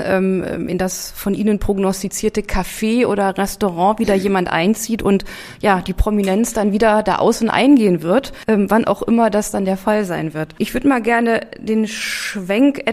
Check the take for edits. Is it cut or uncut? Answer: uncut